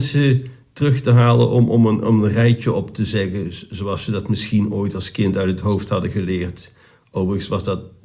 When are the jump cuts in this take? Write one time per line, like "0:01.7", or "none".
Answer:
none

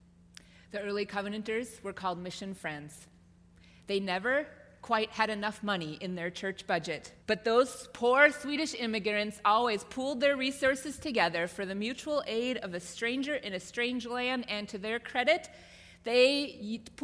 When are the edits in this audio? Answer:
0:07.2

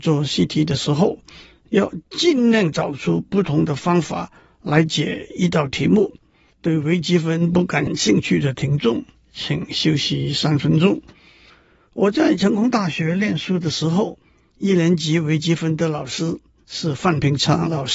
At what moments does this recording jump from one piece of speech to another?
0:06.5

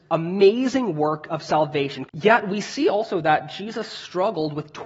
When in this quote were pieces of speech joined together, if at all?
0:02.1

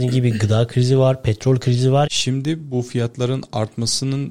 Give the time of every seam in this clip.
0:02.1

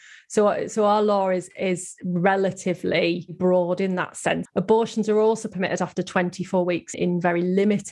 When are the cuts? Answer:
0:04.5
0:06.9

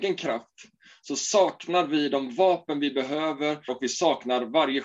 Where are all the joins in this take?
0:03.7

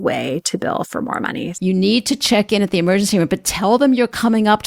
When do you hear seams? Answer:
0:01.5

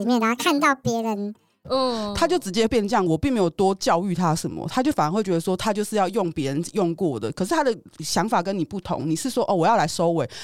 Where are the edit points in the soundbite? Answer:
0:01.6

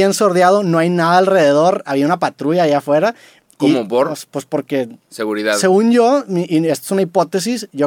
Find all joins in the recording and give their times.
none

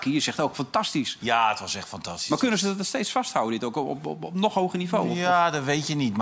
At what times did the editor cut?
none

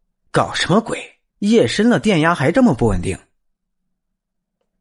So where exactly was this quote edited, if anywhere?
0:01.3

